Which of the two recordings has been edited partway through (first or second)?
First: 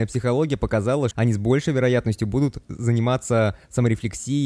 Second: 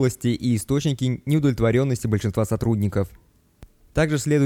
first